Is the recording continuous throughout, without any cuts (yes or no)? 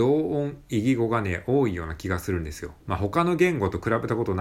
no